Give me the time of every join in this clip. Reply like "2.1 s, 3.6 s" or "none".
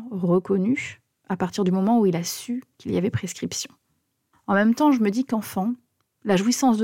4.3 s

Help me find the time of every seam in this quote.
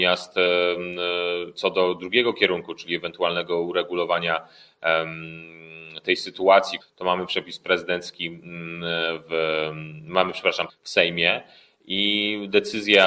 6.8 s, 10.7 s

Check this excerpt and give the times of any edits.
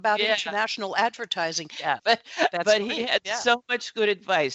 2.0 s

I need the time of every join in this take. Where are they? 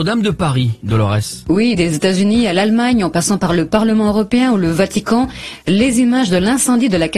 1.7 s

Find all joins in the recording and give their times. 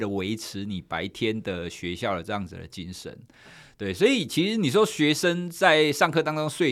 none

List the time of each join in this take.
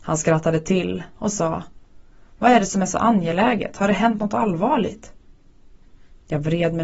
none

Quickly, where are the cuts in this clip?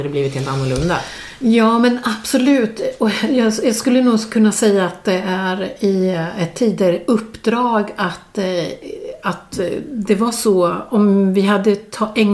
none

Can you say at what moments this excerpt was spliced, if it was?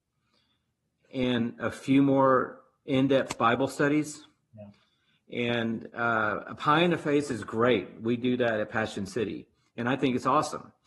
none

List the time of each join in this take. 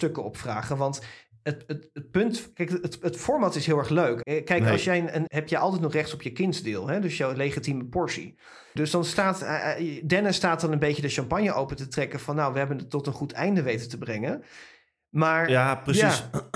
4.2 s, 5.3 s, 8.8 s

